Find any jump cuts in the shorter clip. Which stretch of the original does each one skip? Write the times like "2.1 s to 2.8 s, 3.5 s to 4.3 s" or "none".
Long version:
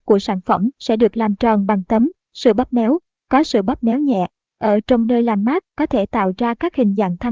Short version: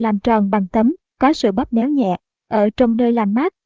2.2 s to 3.1 s